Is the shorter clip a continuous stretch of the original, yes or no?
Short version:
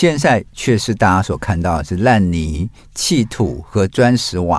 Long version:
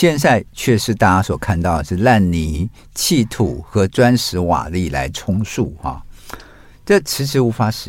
yes